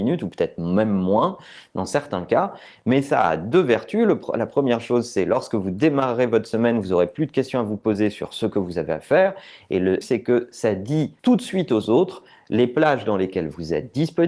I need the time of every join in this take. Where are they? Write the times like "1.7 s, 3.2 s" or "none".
10.0 s, 11.2 s

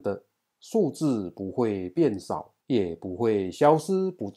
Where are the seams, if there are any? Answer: 2.6 s

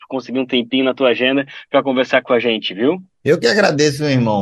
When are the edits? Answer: none

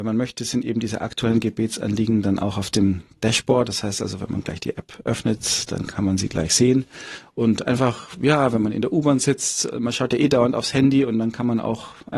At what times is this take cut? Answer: none

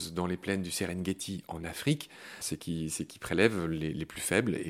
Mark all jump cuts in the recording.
2.4 s

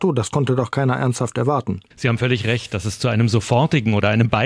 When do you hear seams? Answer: 1.9 s

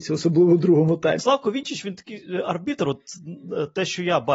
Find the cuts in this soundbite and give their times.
1.2 s

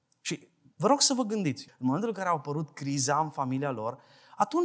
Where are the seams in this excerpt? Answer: 1.7 s

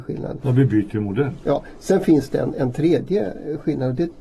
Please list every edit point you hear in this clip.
none

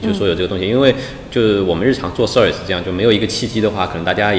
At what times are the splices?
none

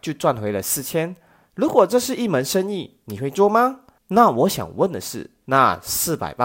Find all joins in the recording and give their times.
4.0 s, 5.4 s

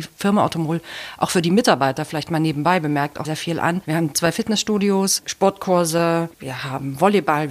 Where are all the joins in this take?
3.2 s

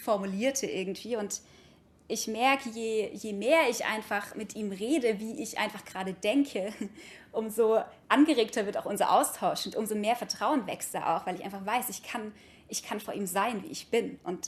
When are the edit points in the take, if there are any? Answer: none

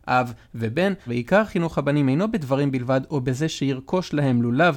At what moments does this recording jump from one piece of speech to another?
1.1 s

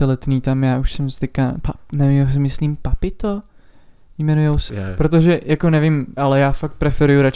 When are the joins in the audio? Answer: 4.7 s, 6.2 s

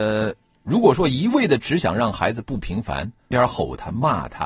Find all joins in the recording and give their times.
3.3 s

